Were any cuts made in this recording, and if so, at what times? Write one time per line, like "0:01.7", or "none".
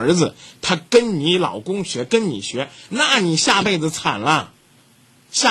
none